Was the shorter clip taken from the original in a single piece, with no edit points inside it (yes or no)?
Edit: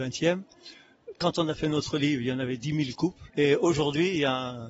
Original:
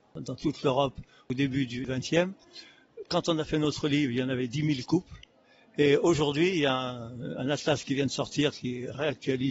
no